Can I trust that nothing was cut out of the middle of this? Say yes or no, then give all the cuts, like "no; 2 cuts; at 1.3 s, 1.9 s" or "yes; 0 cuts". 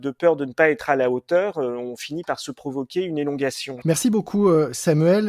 no; 1 cut; at 3.8 s